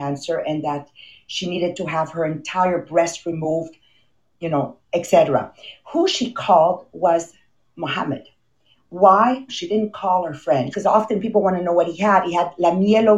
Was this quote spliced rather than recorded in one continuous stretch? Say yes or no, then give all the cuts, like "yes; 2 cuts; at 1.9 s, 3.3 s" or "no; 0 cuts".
yes; 2 cuts; at 9.5 s, 10.7 s